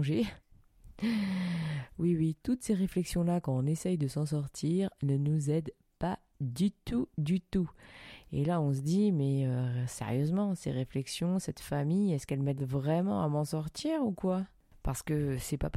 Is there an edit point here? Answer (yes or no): no